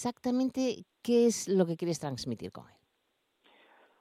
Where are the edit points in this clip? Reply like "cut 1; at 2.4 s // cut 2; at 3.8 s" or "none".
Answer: none

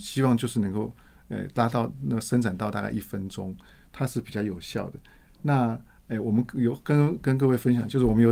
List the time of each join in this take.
none

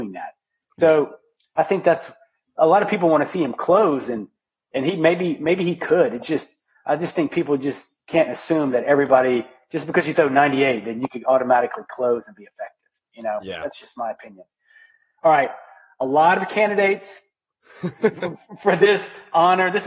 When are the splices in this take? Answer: none

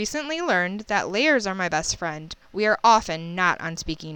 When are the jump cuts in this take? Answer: cut 1; at 2.4 s

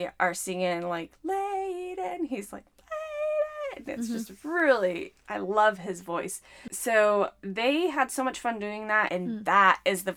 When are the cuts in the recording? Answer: cut 1; at 9.1 s

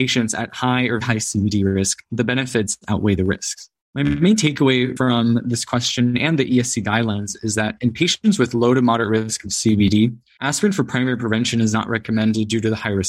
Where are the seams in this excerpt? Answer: cut 1; at 1.0 s

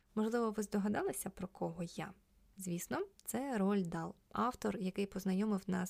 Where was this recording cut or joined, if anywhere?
none

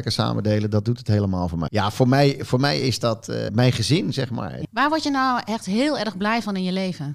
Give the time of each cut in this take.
cut 1; at 1.7 s // cut 2; at 3.5 s // cut 3; at 4.6 s

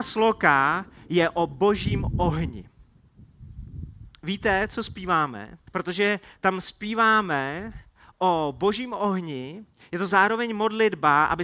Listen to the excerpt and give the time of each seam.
cut 1; at 5.7 s

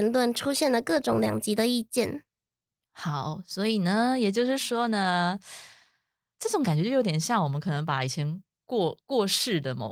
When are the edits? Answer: none

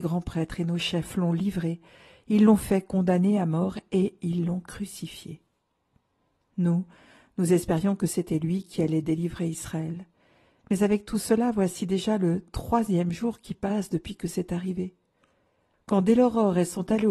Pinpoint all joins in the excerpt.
cut 1; at 15.7 s

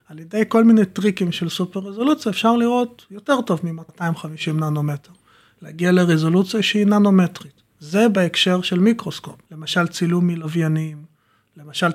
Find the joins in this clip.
cut 1; at 7.7 s // cut 2; at 9.4 s

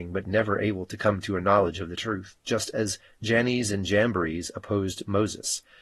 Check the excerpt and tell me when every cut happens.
none

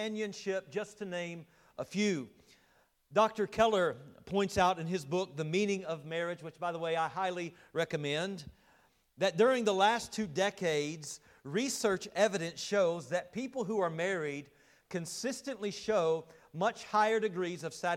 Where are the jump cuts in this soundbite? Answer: none

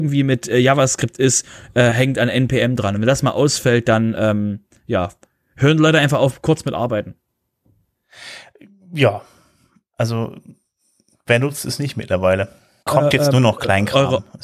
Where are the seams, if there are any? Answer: cut 1; at 12.9 s

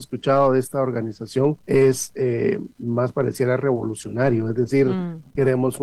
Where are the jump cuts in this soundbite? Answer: cut 1; at 1.6 s

